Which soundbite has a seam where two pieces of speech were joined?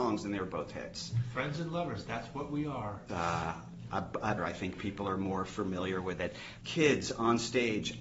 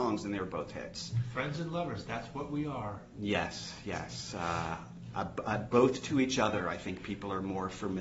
first; 3 cuts; at 3.1 s, 4.4 s, 6.6 s

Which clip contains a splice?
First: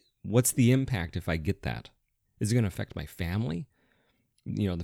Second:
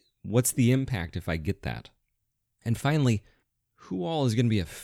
first; 1 cut; at 2.2 s

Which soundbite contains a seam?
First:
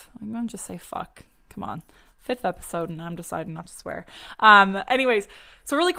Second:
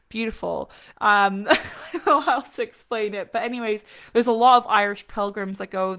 second; 1 cut; at 0.9 s

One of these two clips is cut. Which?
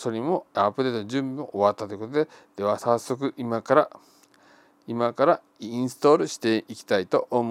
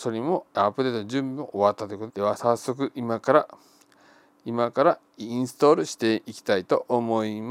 second; 1 cut; at 2.1 s

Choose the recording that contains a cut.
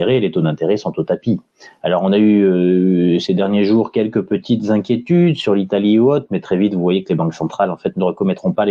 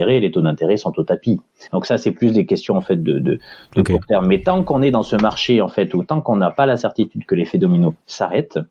second; 1 cut; at 1.7 s

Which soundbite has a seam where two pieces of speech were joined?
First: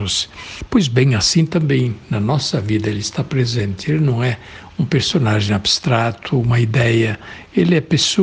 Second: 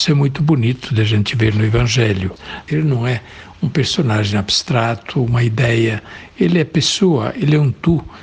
second; 1 cut; at 2.7 s

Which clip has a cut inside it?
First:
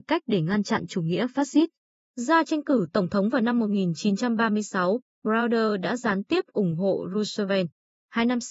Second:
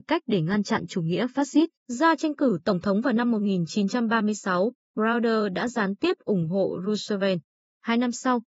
second; 1 cut; at 1.8 s

